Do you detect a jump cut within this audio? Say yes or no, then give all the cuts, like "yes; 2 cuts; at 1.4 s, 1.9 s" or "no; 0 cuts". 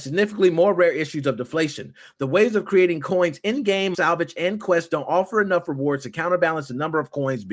yes; 1 cut; at 3.9 s